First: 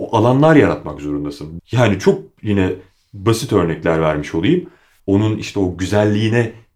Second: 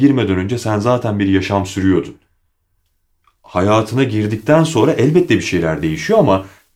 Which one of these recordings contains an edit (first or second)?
first